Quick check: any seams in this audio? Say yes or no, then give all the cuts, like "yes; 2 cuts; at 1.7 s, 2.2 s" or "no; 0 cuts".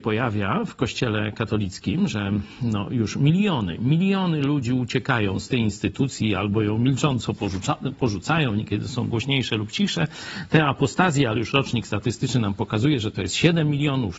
no; 0 cuts